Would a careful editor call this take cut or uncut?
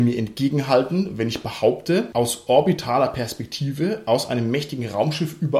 uncut